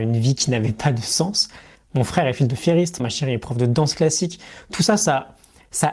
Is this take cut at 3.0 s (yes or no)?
yes